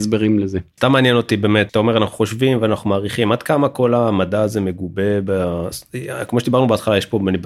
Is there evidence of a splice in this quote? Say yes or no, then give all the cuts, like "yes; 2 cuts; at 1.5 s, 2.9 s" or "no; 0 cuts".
no; 0 cuts